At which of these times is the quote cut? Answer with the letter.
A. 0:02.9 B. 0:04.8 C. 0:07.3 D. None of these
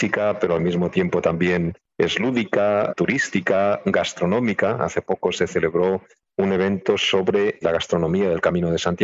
D